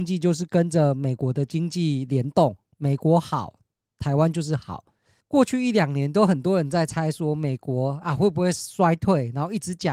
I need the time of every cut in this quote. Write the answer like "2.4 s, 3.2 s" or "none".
5.2 s